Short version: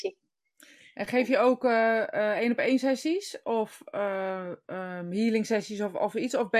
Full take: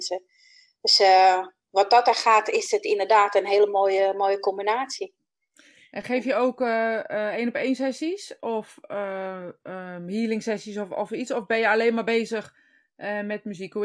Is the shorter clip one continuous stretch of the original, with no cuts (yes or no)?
yes